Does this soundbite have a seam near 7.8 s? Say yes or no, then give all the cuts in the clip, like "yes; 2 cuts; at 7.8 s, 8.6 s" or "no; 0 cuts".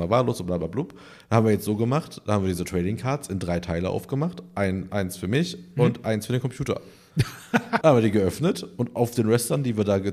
yes; 2 cuts; at 4.9 s, 7.8 s